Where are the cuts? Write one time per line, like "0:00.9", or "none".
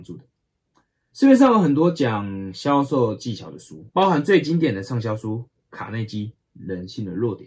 0:01.1
0:03.9